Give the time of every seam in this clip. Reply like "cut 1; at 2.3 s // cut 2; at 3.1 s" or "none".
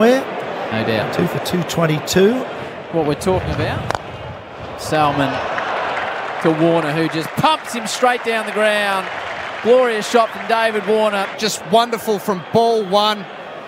cut 1; at 11.3 s